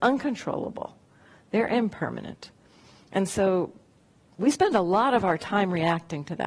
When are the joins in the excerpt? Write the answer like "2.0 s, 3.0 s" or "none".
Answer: none